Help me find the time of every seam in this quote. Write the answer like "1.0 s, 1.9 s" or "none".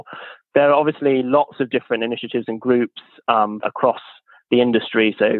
3.6 s